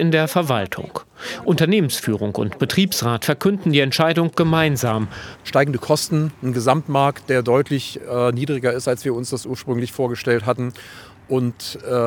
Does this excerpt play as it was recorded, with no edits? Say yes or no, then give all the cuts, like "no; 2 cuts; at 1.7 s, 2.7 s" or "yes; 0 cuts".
no; 1 cut; at 5.4 s